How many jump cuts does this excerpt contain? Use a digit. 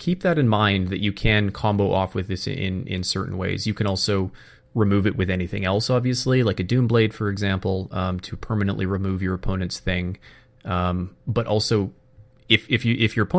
0